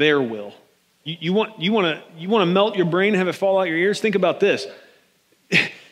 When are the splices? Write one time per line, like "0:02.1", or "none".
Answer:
0:01.0